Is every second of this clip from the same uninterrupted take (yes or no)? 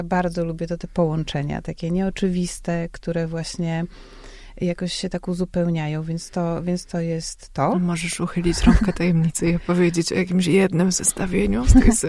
yes